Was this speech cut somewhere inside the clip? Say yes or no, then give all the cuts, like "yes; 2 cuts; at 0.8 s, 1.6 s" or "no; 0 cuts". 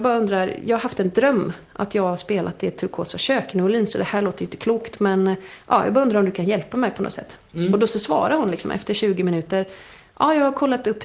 no; 0 cuts